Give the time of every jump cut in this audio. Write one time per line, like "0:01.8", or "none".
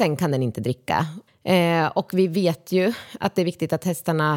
0:01.3